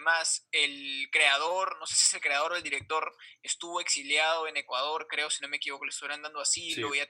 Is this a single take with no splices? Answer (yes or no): yes